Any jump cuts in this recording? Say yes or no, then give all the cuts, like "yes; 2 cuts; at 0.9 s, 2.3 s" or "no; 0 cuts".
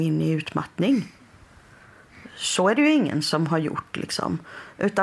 no; 0 cuts